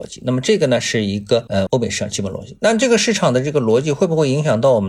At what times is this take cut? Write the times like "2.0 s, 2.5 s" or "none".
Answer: 1.7 s